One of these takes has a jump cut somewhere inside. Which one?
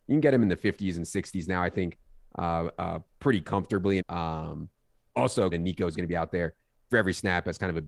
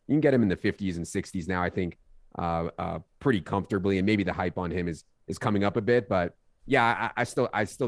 first; 2 cuts; at 4.0 s, 5.5 s

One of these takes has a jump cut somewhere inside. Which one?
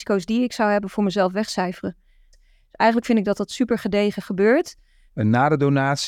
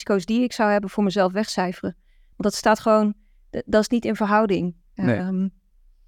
first; 2 cuts; at 2.3 s, 5.1 s

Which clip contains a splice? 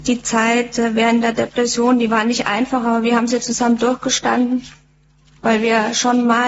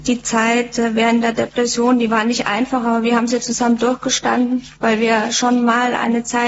second; 1 cut; at 4.8 s

